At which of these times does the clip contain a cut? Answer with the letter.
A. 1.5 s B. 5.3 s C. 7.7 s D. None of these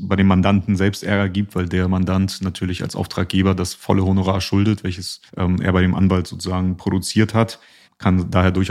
B